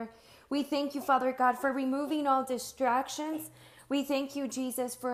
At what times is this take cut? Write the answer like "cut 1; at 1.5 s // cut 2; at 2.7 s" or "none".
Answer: none